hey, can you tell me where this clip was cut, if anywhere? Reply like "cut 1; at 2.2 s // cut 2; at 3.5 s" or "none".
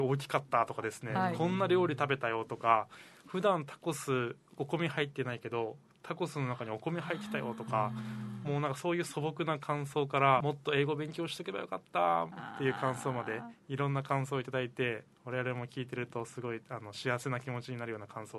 cut 1; at 10.4 s